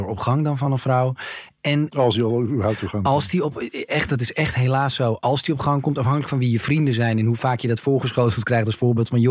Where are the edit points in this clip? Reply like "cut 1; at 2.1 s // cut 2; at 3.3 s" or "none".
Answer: none